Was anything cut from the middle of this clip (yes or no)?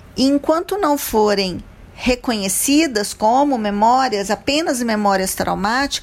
no